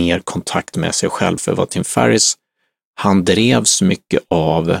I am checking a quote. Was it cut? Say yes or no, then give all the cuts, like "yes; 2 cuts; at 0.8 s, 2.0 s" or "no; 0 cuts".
yes; 1 cut; at 1.4 s